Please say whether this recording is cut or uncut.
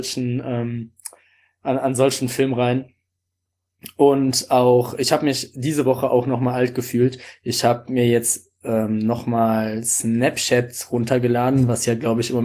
uncut